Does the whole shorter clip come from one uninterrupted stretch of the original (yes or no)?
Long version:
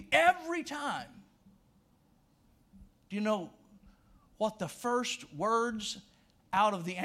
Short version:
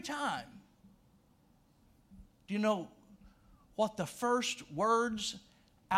yes